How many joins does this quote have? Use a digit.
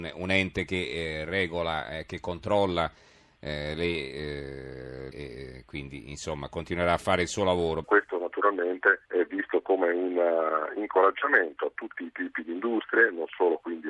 3